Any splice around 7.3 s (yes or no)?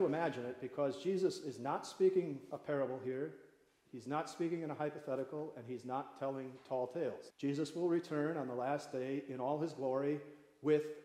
yes